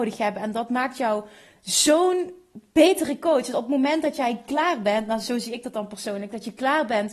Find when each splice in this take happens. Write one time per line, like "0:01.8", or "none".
none

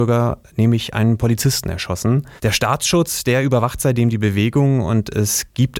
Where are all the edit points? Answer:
0:02.4

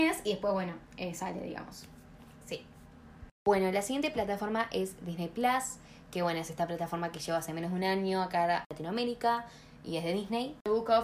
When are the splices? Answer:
none

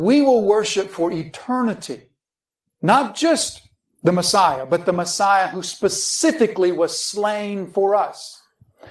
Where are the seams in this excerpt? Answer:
none

